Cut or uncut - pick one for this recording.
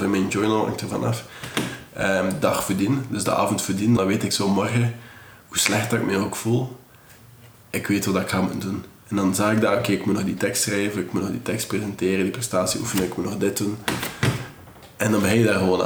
cut